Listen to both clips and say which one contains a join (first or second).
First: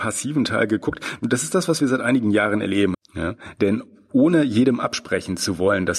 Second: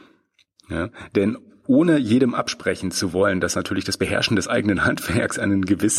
first